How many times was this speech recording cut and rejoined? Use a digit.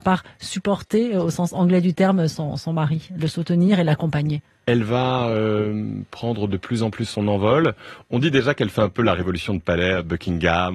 0